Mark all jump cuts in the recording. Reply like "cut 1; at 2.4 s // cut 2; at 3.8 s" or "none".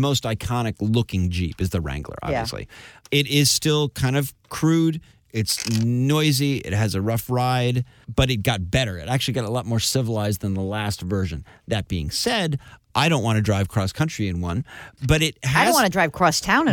none

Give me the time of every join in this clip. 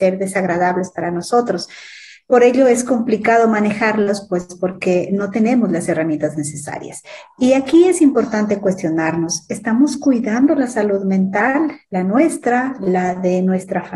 none

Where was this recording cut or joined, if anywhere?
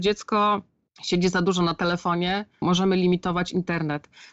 cut 1; at 2.6 s

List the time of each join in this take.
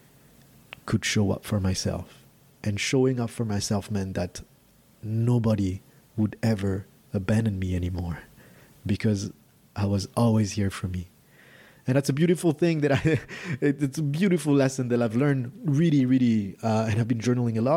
none

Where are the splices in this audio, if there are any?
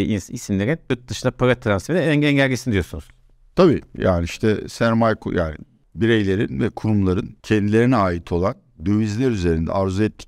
cut 1; at 7.4 s

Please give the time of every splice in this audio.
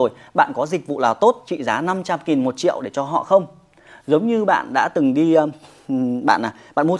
none

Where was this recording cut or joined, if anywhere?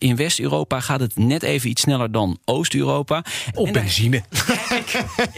cut 1; at 3.5 s

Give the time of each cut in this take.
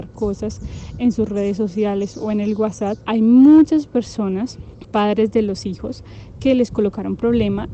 cut 1; at 4.8 s

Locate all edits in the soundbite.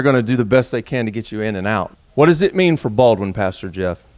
cut 1; at 1.9 s

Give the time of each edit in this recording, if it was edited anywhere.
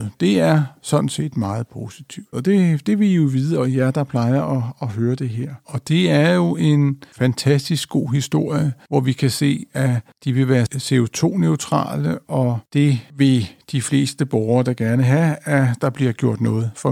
cut 1; at 2.3 s // cut 2; at 5.6 s

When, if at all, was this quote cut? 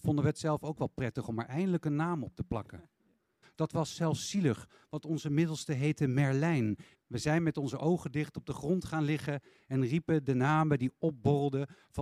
cut 1; at 3.4 s // cut 2; at 6.9 s

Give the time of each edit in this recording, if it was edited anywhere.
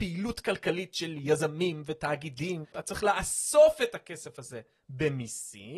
cut 1; at 2.7 s

